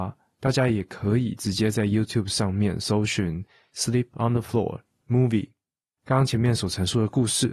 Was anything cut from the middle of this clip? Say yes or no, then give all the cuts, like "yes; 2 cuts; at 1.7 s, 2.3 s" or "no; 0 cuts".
no; 0 cuts